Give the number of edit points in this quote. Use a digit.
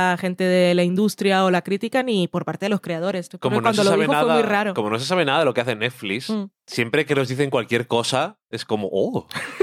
0